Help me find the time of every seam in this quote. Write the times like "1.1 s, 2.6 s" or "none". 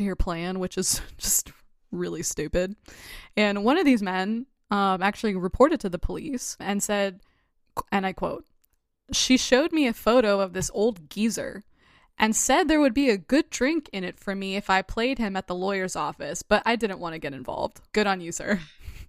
none

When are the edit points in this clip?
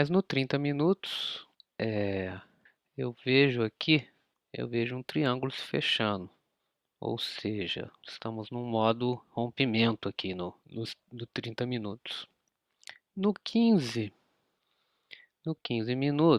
4.5 s, 10.6 s

